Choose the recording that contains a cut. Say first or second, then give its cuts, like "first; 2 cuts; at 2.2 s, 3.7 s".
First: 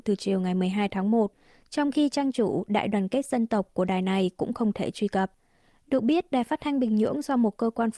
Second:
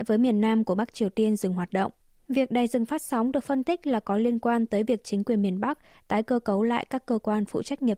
second; 1 cut; at 2.2 s